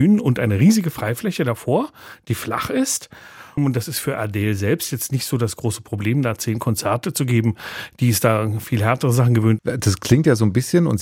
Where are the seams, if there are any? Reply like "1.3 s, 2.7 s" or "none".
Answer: 3.6 s, 9.6 s